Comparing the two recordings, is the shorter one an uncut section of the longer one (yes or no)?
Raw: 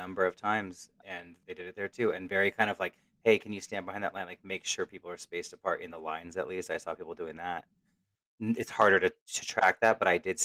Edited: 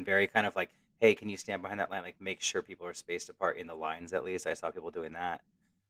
yes